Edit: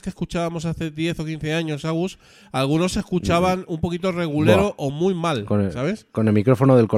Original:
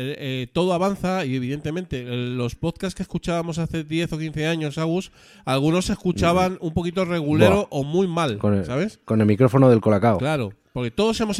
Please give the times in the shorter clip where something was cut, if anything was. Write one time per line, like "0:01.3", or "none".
none